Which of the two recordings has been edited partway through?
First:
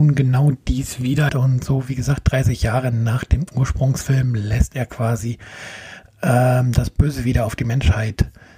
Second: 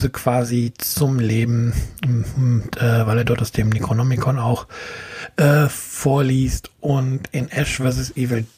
first; 1 cut; at 1.3 s

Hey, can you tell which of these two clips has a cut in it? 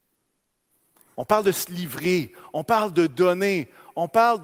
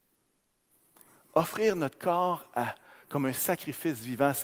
first; 1 cut; at 1.1 s

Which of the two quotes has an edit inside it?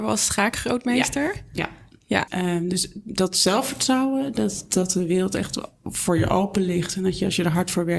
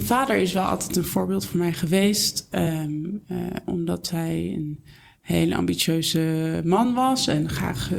first; 1 cut; at 2.3 s

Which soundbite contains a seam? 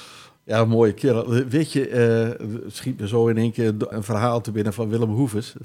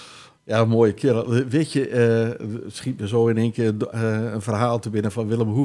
first; 1 cut; at 3.9 s

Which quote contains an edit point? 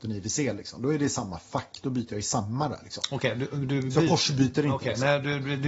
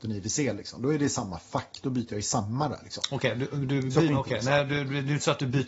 second; 1 cut; at 4.1 s

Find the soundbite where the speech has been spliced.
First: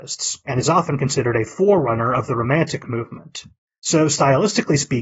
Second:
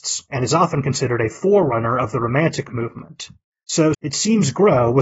second; 1 cut; at 3.9 s

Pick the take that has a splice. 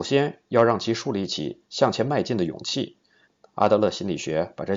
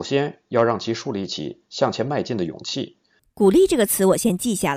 second; 1 cut; at 3.2 s

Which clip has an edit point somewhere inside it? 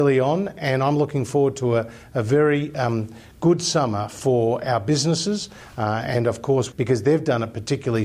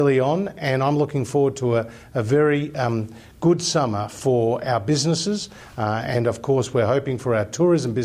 first; 1 cut; at 6.7 s

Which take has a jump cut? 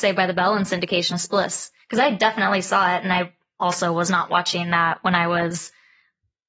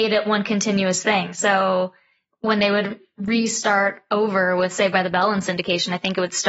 first; 1 cut; at 1.1 s

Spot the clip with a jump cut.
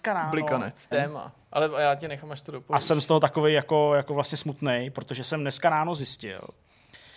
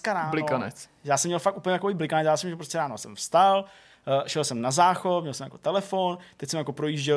first; 1 cut; at 0.9 s

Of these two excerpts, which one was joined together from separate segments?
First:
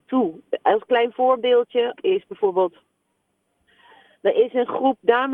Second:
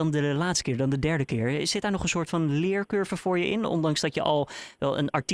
first; 1 cut; at 2.0 s

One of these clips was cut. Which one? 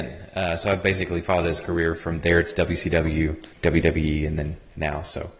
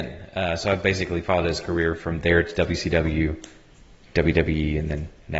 first; 1 cut; at 3.5 s

